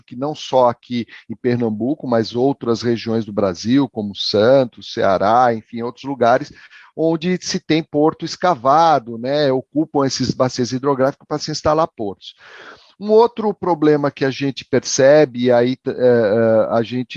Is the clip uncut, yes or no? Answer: yes